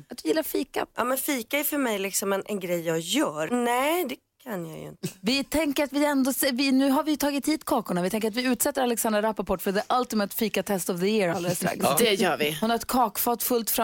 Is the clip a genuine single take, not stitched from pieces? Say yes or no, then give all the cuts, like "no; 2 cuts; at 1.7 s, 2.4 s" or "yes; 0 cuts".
no; 1 cut; at 3.5 s